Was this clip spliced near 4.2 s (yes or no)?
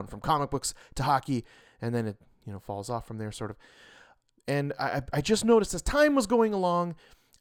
no